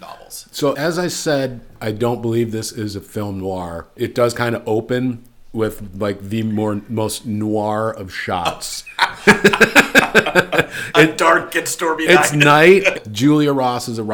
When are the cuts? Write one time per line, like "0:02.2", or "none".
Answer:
0:12.9